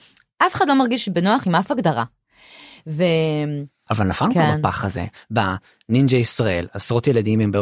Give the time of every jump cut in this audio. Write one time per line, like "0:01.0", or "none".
0:03.9
0:05.2